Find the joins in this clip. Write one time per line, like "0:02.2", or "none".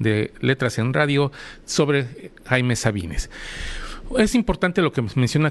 none